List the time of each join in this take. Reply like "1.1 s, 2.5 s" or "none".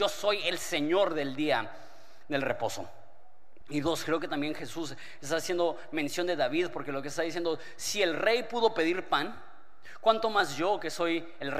3.6 s